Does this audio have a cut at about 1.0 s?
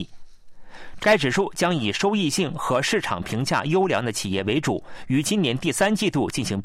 yes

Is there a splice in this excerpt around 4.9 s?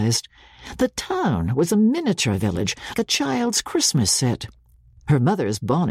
no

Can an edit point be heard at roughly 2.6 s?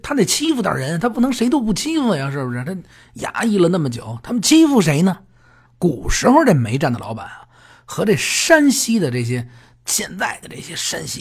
no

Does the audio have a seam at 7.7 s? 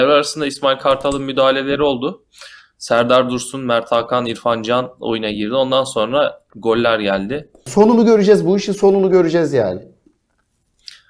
yes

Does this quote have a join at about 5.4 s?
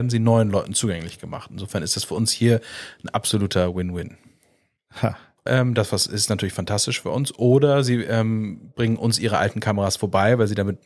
yes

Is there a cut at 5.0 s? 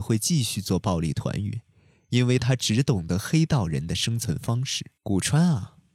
yes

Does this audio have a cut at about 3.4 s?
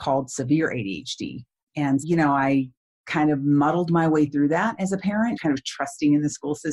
no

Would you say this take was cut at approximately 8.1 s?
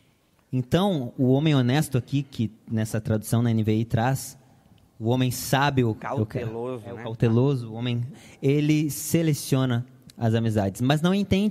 yes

